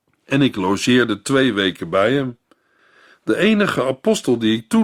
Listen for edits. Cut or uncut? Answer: uncut